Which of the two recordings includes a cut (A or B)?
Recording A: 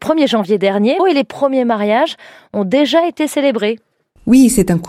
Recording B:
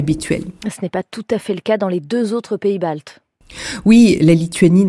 A